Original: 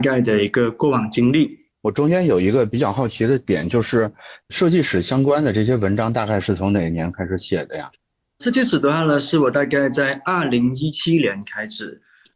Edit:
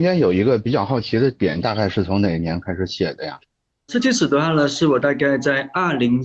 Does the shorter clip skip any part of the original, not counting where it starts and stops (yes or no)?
yes